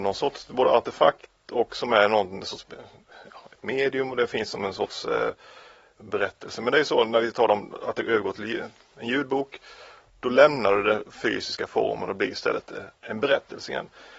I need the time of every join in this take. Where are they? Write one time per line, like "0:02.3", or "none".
none